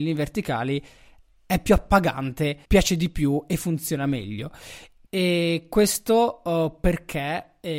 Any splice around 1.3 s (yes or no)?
no